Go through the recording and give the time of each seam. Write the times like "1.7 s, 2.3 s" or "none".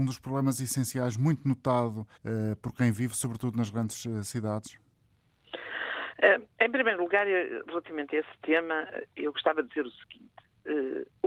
2.2 s